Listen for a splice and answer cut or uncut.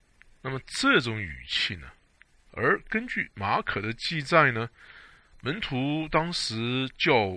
cut